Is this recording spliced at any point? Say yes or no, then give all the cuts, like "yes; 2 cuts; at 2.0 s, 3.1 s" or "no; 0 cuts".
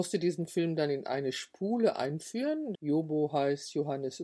yes; 1 cut; at 2.7 s